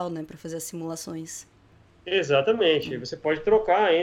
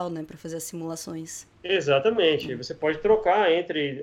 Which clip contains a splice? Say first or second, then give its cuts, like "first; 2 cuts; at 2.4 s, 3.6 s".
second; 1 cut; at 1.5 s